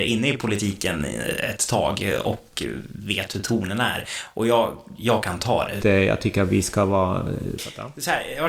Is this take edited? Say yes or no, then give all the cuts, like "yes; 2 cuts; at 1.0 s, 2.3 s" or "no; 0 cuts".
yes; 2 cuts; at 5.8 s, 7.6 s